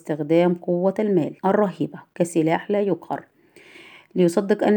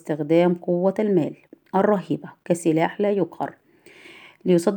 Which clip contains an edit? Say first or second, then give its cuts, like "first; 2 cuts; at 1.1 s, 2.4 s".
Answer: first; 1 cut; at 1.4 s